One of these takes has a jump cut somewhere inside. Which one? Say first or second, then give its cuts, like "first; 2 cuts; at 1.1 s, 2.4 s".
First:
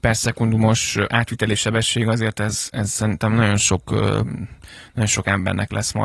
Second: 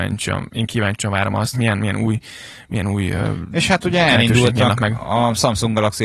second; 1 cut; at 1.5 s